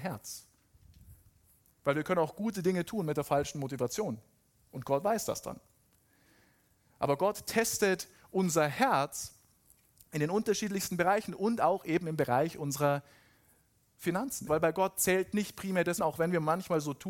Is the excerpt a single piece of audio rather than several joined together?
no; 2 cuts; at 14.5 s, 16.0 s

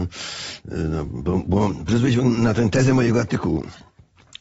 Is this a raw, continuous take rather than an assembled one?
yes; 0 cuts

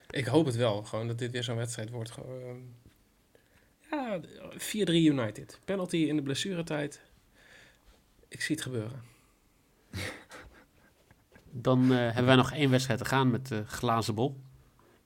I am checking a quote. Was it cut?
no; 0 cuts

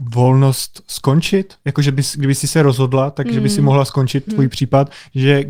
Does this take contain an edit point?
yes; 1 cut; at 4.3 s

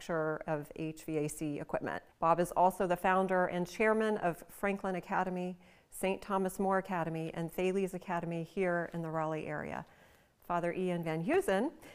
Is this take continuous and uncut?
no; 1 cut; at 2.1 s

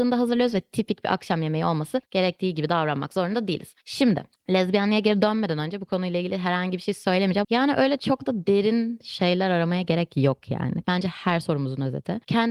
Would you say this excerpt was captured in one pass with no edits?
no; 2 cuts; at 7.4 s, 10.8 s

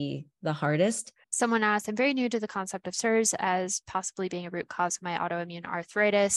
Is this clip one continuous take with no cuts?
no; 1 cut; at 1.2 s

